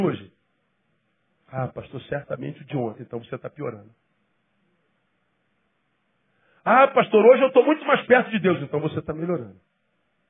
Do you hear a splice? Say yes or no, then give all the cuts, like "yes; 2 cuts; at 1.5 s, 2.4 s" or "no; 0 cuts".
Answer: no; 0 cuts